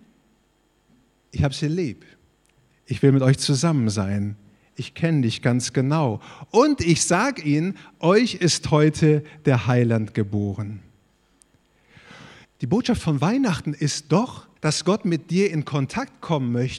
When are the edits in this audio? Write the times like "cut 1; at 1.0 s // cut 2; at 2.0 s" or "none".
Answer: cut 1; at 12.4 s // cut 2; at 14.6 s